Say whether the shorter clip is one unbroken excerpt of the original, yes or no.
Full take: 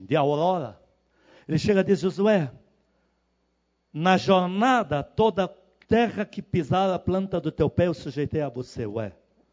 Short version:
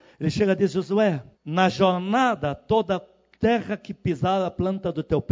no